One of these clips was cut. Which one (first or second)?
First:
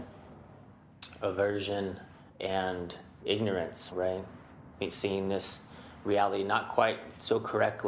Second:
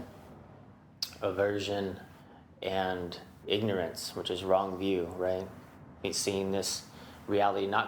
first